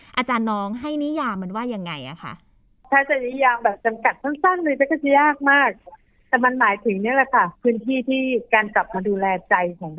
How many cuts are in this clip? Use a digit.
0